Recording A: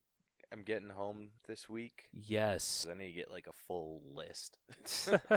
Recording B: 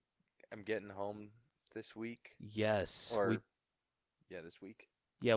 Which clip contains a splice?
A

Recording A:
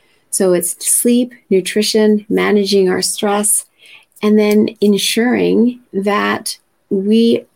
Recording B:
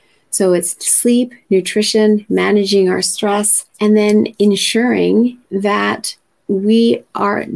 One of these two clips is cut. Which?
B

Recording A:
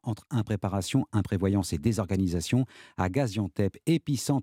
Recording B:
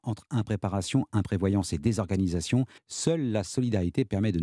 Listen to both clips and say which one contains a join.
B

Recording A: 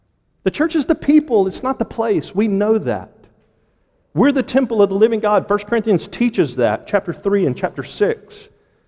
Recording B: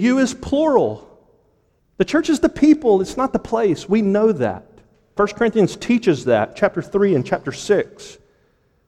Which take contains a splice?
B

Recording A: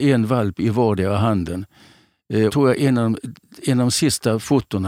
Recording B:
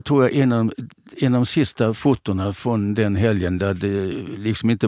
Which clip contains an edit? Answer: A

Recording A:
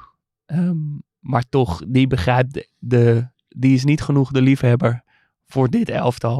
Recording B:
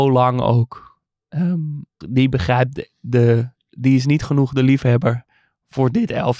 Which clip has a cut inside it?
B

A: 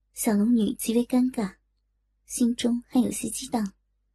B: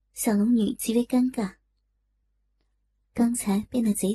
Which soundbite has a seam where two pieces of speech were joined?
A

